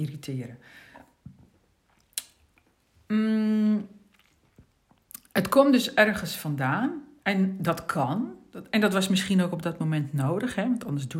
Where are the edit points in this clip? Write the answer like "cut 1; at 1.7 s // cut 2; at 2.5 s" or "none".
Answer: cut 1; at 7.2 s